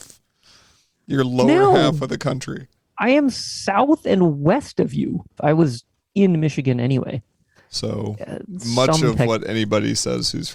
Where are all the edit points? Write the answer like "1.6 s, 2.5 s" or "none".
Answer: 5.4 s, 7.6 s